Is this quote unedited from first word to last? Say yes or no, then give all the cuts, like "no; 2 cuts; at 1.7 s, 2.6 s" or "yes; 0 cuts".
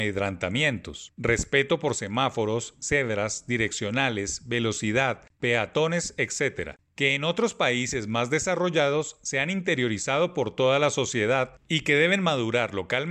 no; 1 cut; at 1.1 s